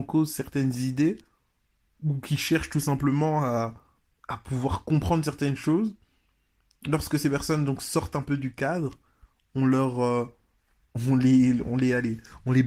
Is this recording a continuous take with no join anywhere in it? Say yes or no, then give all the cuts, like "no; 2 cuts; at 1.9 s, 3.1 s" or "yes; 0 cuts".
yes; 0 cuts